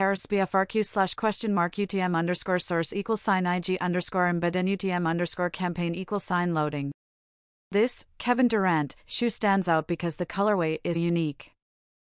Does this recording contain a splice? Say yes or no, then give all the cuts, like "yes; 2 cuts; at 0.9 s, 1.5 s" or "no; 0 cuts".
yes; 1 cut; at 10.9 s